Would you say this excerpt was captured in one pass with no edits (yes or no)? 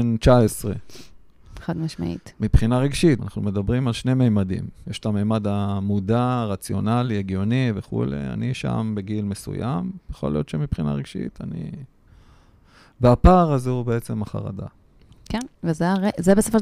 no